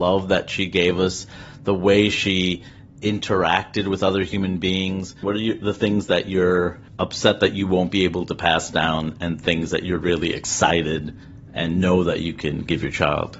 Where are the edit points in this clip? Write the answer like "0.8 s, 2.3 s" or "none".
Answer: 5.2 s, 6.9 s

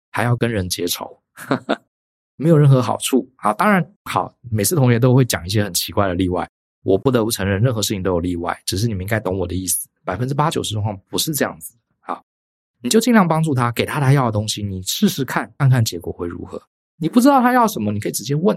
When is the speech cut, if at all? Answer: 15.6 s

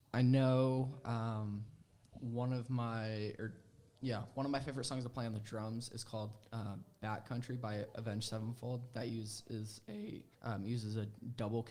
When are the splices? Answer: 10.3 s

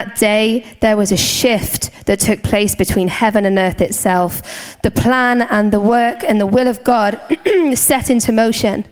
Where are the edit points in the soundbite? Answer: none

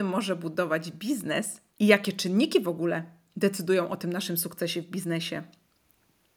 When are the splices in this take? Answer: 1.7 s

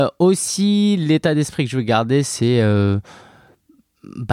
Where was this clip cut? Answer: none

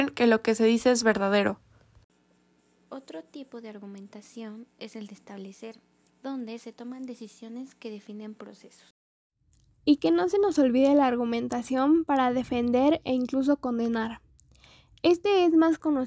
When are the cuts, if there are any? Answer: 6.1 s

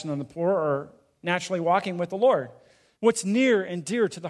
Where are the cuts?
3.0 s

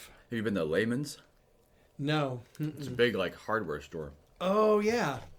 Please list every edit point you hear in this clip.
none

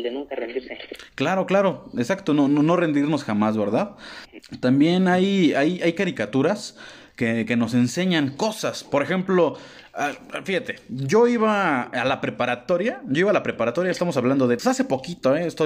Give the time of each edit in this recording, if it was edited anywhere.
14.6 s

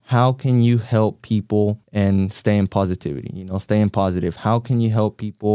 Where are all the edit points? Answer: 1.8 s

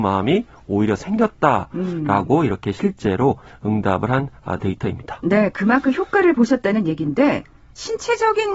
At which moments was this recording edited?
none

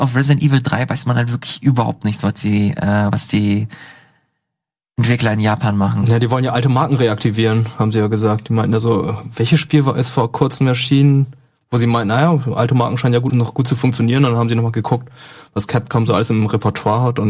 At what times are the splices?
13.3 s

